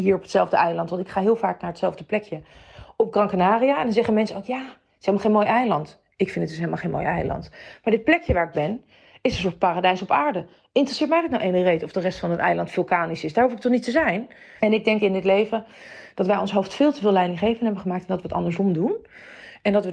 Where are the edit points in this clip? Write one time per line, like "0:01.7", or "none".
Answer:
0:14.6